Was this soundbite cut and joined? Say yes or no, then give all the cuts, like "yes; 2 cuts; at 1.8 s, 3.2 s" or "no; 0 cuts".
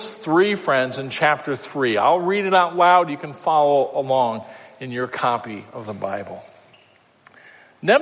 no; 0 cuts